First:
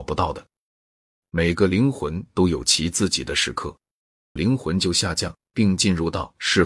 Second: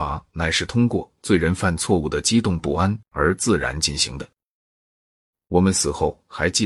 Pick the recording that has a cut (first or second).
first